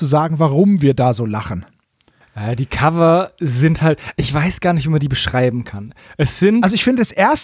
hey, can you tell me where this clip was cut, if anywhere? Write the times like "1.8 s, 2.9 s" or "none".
none